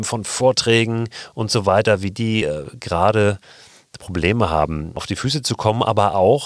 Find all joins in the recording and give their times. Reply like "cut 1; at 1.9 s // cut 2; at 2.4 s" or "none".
none